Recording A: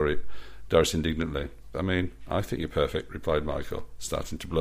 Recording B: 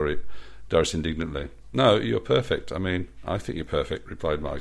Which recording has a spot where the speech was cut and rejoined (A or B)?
A